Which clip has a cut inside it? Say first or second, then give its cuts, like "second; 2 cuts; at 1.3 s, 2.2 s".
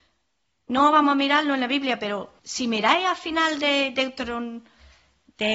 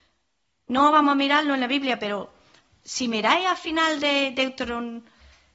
first; 1 cut; at 2.4 s